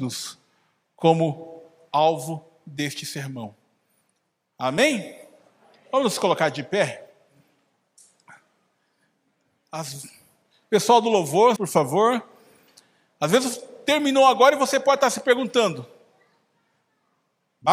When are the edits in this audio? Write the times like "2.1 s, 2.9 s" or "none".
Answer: 11.6 s

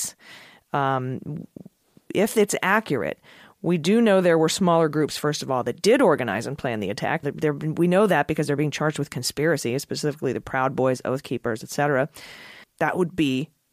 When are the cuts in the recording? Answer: 7.2 s, 12.6 s

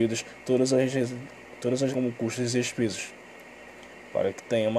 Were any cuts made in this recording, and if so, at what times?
1.9 s

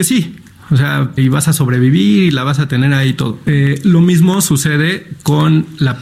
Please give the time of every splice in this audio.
1.2 s, 3.5 s

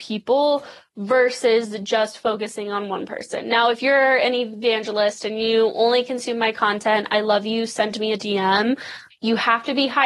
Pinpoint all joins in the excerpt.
9.1 s

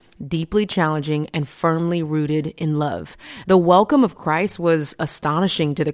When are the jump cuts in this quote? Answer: 3.4 s

